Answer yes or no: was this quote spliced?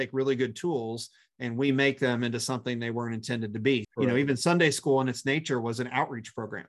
yes